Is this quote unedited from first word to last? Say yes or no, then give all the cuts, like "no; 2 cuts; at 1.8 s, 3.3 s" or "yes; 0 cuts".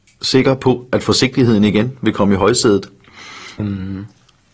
no; 1 cut; at 3.6 s